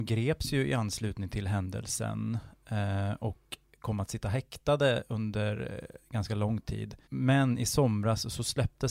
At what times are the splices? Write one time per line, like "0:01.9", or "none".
0:07.0